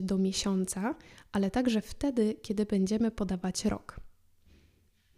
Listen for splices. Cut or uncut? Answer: uncut